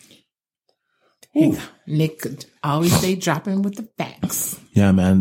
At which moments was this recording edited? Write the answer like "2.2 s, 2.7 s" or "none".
none